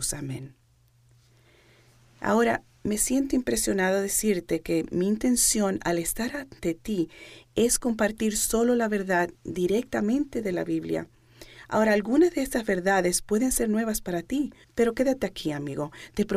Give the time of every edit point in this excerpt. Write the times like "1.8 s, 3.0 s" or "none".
14.6 s